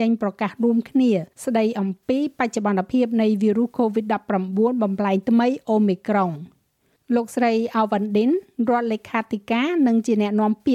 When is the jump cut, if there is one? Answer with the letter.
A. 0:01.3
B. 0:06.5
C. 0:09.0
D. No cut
A